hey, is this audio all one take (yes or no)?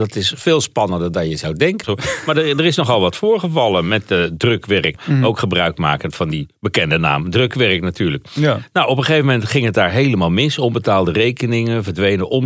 no